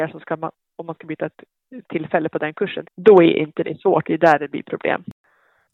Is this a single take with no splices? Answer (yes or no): no